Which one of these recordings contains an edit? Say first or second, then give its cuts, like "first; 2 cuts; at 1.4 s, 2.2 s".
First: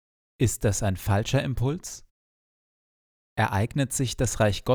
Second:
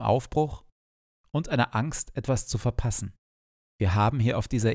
second; 1 cut; at 3.6 s